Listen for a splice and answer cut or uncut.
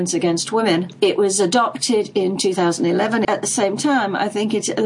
cut